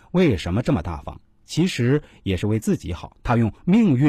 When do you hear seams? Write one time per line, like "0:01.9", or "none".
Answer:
0:01.4
0:03.1